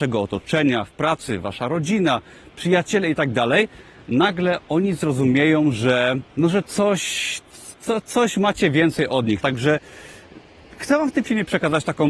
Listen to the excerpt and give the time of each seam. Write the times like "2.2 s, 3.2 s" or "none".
6.3 s, 9.4 s

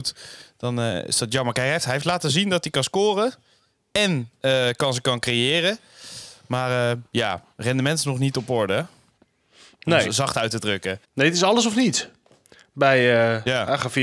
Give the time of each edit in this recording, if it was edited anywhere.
11.0 s

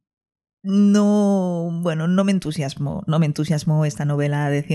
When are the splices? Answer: none

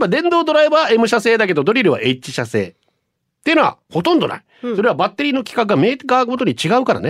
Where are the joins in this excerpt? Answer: none

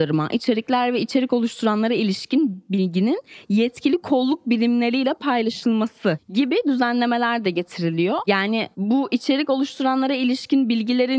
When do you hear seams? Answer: none

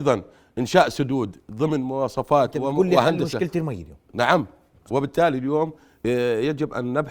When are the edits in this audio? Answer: 4.9 s

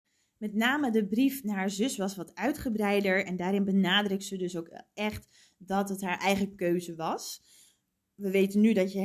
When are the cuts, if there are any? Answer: none

